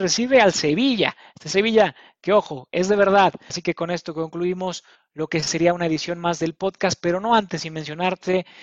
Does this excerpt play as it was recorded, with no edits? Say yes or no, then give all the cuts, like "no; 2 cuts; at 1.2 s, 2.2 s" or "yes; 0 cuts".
no; 1 cut; at 3.5 s